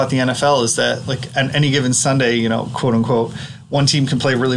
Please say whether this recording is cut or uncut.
uncut